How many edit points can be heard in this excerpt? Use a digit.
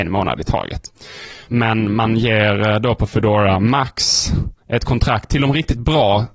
2